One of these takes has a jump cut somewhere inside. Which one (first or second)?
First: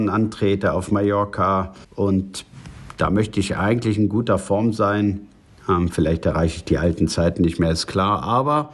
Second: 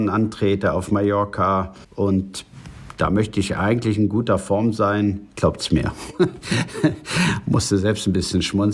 second